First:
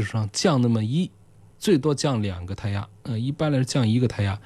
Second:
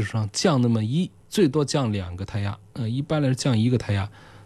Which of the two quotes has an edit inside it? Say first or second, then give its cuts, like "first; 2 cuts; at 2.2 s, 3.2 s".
second; 1 cut; at 1.2 s